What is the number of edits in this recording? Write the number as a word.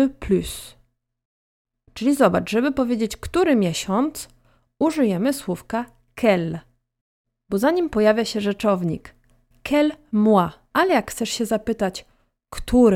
one